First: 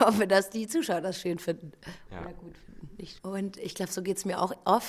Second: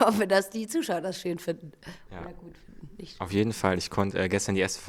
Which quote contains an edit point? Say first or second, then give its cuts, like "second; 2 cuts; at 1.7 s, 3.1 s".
first; 1 cut; at 3.2 s